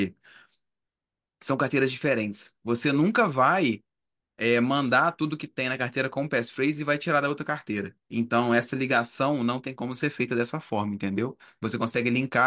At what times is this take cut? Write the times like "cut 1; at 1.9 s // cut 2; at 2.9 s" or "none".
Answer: none